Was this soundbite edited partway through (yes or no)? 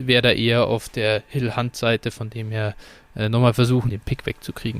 yes